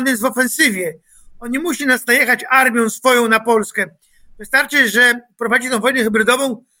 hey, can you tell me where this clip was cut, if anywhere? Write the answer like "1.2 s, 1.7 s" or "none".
none